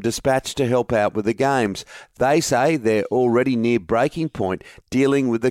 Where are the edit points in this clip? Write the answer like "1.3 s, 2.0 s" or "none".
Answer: none